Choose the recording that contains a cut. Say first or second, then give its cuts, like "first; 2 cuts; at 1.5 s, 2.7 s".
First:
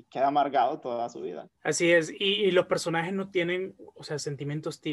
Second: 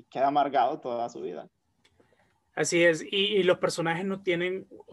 first; 1 cut; at 1.6 s